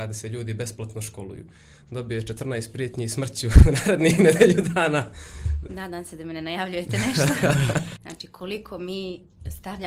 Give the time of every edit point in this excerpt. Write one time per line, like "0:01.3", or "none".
0:05.7
0:08.0